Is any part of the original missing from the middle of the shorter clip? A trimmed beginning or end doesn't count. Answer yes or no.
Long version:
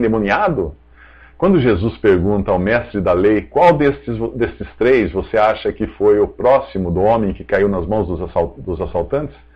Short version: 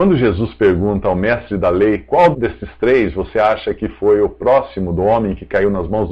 yes